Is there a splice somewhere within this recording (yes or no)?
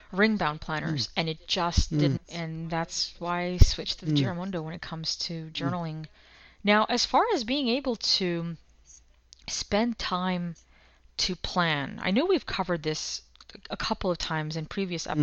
yes